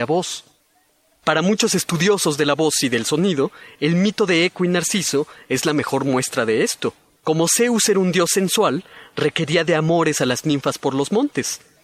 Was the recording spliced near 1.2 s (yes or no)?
no